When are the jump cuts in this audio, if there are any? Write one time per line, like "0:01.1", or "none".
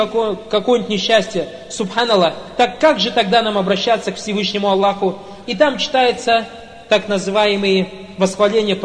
0:05.4